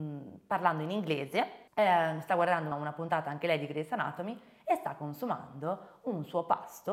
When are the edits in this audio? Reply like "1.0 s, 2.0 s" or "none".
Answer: 1.7 s, 2.7 s